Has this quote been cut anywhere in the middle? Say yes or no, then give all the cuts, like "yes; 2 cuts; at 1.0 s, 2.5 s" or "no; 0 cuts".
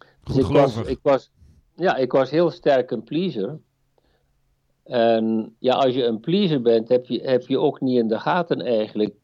no; 0 cuts